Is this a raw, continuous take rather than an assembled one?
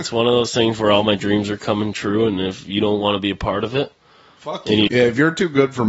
no; 1 cut; at 4.9 s

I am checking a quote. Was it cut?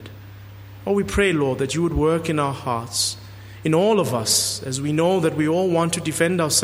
no; 0 cuts

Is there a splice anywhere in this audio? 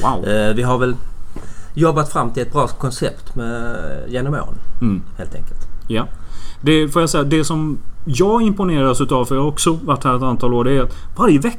no; 0 cuts

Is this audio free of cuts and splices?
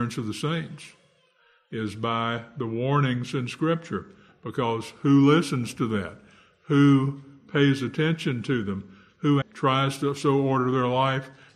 no; 1 cut; at 9.4 s

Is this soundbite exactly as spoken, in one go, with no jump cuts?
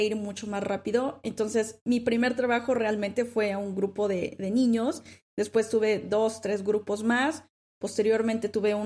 yes; 0 cuts

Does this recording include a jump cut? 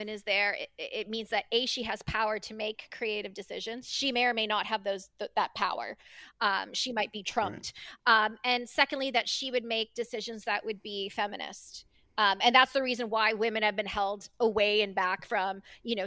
no; 0 cuts

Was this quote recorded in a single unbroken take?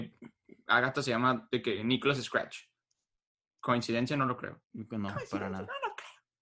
no; 1 cut; at 4.6 s

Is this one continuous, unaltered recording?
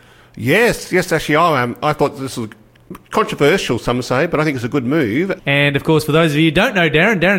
no; 1 cut; at 5.4 s

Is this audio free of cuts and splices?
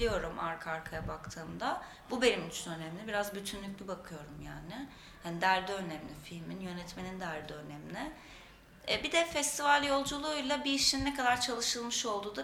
yes; 0 cuts

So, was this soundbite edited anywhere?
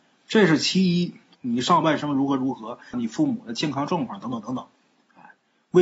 yes; 2 cuts; at 1.3 s, 2.9 s

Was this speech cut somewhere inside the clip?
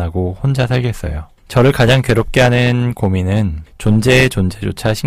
no; 0 cuts

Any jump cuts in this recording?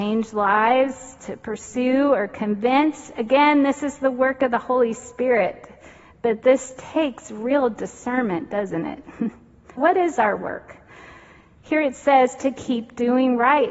yes; 1 cut; at 9.8 s

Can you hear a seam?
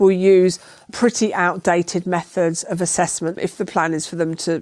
yes; 1 cut; at 3.3 s

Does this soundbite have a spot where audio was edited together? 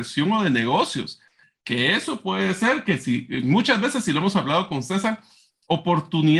no; 0 cuts

